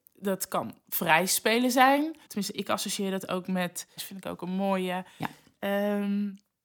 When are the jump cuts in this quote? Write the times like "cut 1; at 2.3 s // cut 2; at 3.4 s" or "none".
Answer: cut 1; at 2.3 s // cut 2; at 4.0 s